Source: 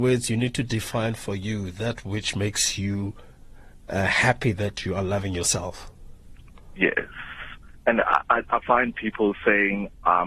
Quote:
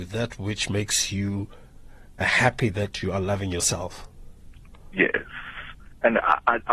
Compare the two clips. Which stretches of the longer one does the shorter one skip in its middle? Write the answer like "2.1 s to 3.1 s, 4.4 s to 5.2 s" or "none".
3.9 s to 4.0 s